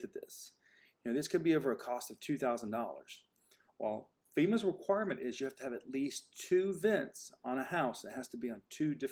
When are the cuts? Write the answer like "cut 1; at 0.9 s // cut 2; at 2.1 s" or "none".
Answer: none